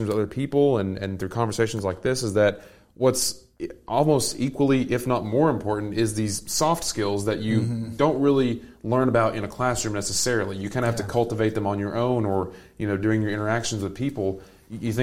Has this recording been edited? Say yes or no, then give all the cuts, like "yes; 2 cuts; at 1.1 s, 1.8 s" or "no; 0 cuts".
no; 0 cuts